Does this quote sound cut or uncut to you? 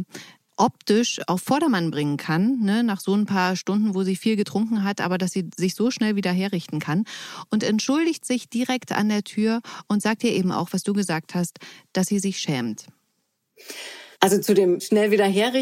cut